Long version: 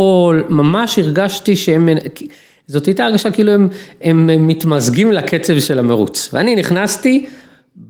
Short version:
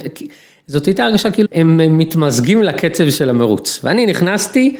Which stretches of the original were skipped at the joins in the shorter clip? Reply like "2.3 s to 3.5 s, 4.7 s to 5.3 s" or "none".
3.5 s to 3.9 s